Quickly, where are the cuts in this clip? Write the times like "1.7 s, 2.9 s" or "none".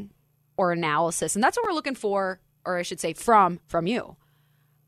3.6 s